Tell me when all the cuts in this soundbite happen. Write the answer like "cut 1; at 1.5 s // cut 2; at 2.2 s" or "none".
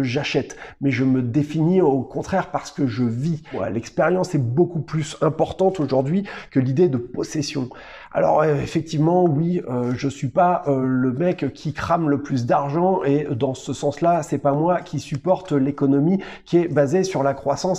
none